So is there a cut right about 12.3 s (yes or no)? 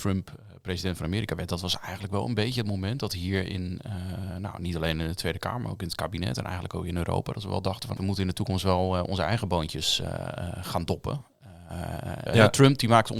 yes